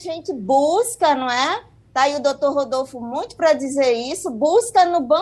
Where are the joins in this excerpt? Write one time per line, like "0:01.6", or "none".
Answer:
none

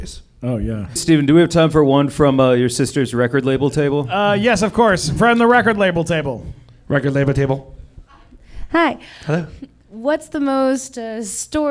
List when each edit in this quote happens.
0:01.0

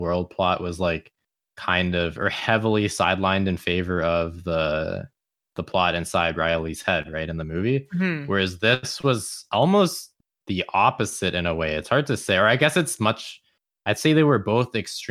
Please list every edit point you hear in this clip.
none

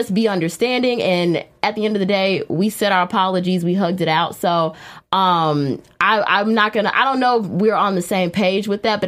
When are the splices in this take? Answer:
none

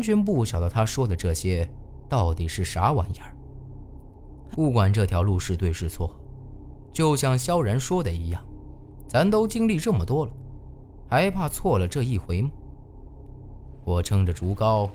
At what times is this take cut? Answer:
0:04.5

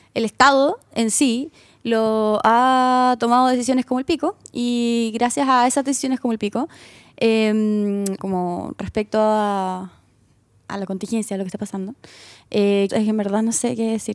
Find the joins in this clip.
0:08.2
0:12.9

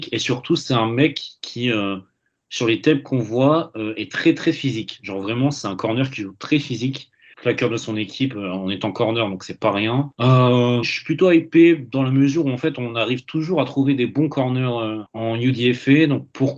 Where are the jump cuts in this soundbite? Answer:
0:07.3
0:10.8

